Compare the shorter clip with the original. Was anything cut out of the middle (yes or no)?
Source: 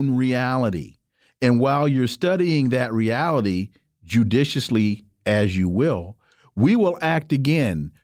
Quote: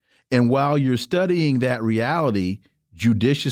no